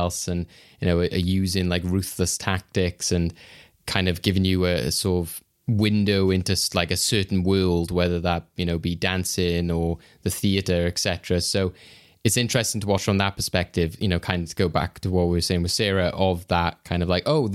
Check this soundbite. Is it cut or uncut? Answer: uncut